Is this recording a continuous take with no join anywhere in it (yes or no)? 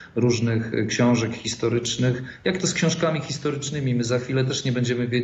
yes